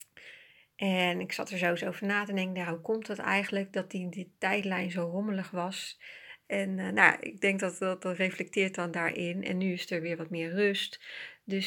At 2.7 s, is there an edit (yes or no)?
no